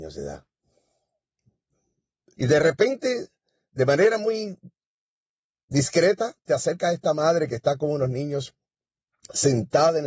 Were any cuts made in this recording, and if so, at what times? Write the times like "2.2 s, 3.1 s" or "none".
2.3 s